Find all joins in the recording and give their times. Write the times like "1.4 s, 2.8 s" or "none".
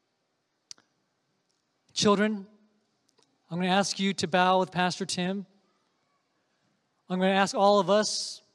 none